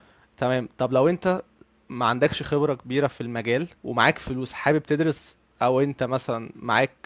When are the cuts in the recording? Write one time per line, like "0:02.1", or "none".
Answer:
0:03.8